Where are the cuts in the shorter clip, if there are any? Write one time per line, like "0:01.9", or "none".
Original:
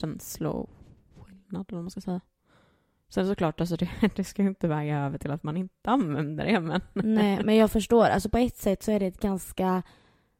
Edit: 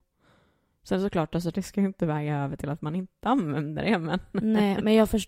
0:01.5